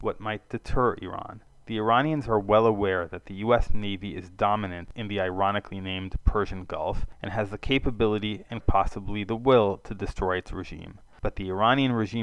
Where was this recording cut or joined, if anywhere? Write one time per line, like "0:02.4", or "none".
0:08.6